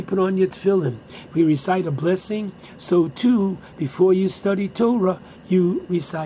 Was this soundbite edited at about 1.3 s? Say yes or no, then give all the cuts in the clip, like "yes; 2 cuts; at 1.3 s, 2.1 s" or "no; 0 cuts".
yes; 1 cut; at 1.3 s